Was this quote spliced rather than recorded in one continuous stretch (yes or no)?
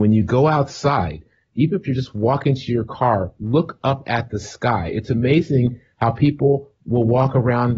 no